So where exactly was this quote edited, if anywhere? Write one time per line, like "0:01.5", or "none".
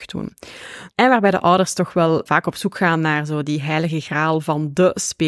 0:00.9
0:02.3